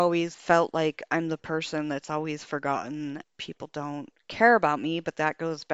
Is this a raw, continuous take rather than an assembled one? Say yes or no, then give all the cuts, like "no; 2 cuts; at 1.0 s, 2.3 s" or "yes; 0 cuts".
yes; 0 cuts